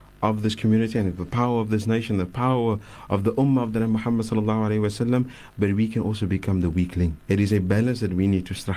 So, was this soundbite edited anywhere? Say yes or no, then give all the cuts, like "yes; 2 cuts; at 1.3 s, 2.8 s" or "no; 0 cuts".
yes; 1 cut; at 7.2 s